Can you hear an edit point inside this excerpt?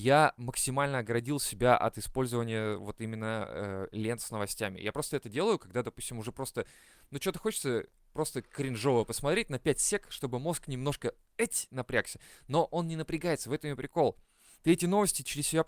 no; 0 cuts

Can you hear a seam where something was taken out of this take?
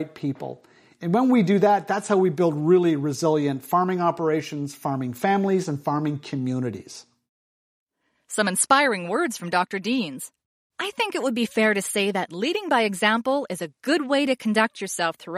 no; 0 cuts

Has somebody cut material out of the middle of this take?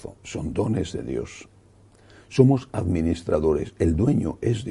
no; 0 cuts

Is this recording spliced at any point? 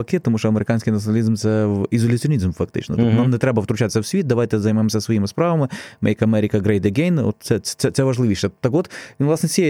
no; 0 cuts

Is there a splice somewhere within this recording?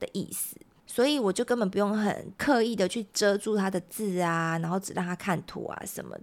no; 0 cuts

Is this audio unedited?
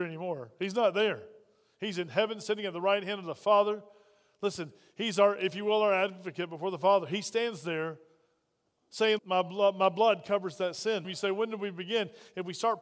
no; 2 cuts; at 9.2 s, 11.0 s

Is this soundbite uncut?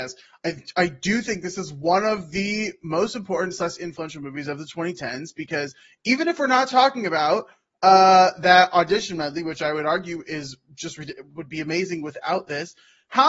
yes; 0 cuts

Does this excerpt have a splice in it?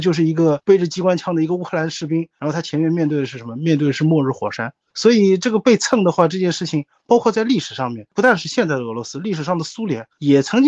no; 0 cuts

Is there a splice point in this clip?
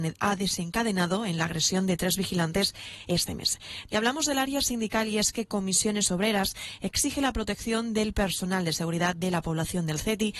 yes; 1 cut; at 3.9 s

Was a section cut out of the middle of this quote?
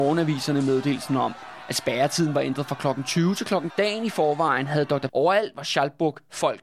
yes; 2 cuts; at 3.7 s, 5.1 s

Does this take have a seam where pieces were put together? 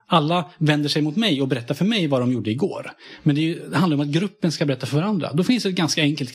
no; 0 cuts

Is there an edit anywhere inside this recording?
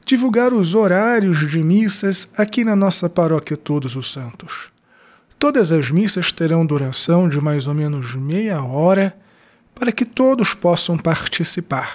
no; 0 cuts

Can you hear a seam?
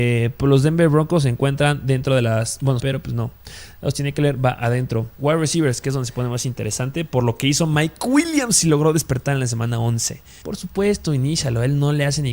yes; 2 cuts; at 2.8 s, 10.4 s

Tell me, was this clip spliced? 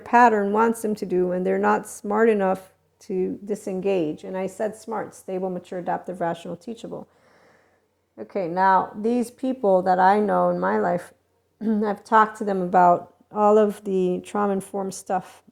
no; 0 cuts

